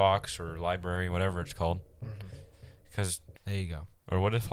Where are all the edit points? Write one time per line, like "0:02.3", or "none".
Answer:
0:03.4